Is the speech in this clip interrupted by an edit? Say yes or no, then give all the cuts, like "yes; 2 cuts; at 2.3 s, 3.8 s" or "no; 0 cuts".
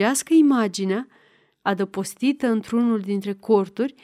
yes; 1 cut; at 1.5 s